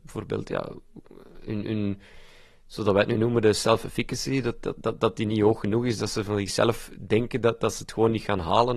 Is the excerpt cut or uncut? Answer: uncut